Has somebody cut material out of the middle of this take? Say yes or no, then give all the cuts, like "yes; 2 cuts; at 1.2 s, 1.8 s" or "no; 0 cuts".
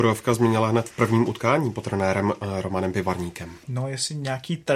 yes; 1 cut; at 3.6 s